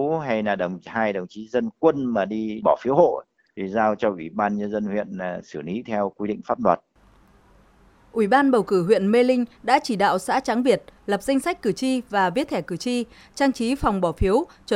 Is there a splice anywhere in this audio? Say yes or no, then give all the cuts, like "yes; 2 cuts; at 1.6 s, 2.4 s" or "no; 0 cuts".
no; 0 cuts